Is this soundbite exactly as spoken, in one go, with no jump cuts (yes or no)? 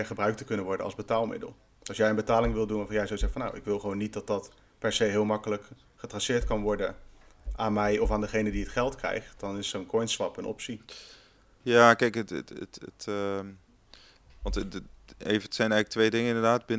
yes